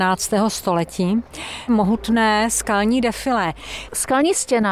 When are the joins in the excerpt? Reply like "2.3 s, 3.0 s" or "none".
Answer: 1.7 s